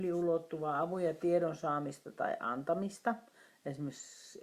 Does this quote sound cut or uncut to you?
uncut